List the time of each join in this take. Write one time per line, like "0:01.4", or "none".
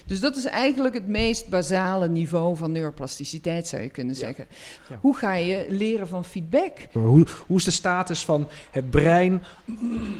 0:04.8
0:07.0